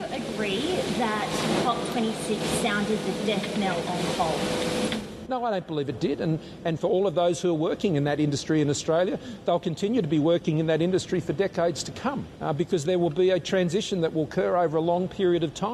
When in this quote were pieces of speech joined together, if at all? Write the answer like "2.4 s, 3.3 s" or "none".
5.3 s